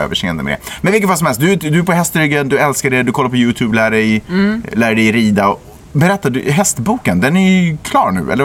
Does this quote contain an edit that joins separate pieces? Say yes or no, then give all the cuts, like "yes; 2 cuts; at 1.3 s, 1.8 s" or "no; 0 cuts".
no; 0 cuts